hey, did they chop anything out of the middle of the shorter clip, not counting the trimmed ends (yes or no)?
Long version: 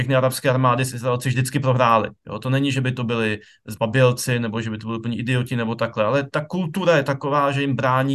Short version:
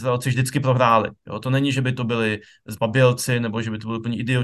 no